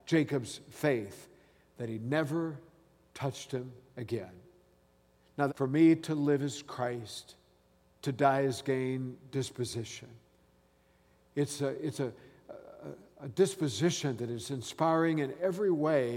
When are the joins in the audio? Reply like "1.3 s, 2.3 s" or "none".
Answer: 5.5 s